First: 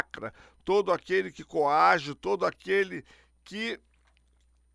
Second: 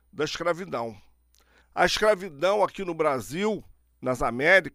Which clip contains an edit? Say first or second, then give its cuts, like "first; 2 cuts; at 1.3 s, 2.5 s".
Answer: second; 1 cut; at 1.6 s